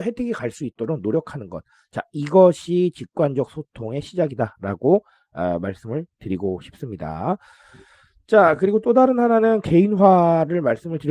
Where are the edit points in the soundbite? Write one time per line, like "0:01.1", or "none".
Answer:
none